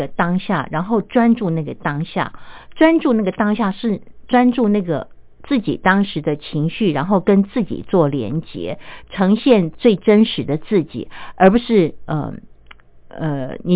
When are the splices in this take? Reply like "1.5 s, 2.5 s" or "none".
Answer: none